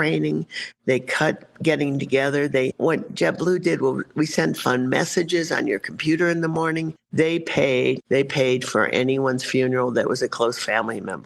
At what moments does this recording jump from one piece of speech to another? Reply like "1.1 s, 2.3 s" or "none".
7.0 s, 8.0 s